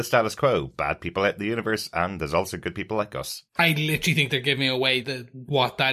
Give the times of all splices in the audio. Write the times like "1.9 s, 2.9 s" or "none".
3.5 s, 5.0 s